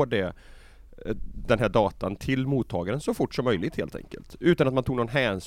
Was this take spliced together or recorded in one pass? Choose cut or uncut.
uncut